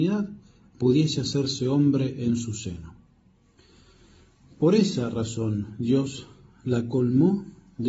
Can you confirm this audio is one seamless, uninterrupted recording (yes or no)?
yes